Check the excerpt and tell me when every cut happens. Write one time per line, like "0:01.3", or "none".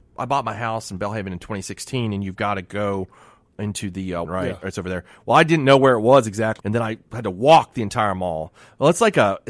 0:04.2
0:06.6